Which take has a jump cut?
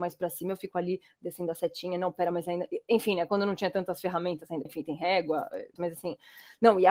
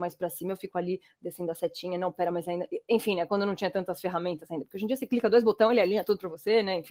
first; 2 cuts; at 4.7 s, 5.8 s

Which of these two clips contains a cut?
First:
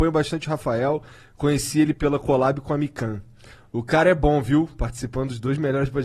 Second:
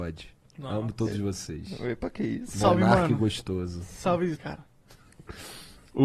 second; 1 cut; at 4.4 s

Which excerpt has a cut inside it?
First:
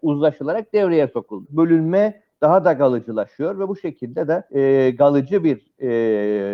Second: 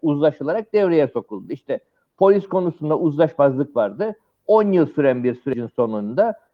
first; 2 cuts; at 1.4 s, 4.5 s

